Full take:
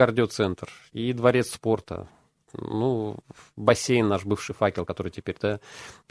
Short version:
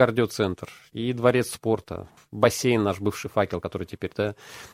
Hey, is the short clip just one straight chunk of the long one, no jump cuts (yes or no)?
no